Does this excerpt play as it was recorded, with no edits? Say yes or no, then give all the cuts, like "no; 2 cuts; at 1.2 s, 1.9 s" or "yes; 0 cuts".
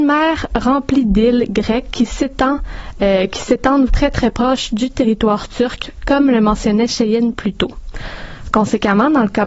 no; 1 cut; at 3.9 s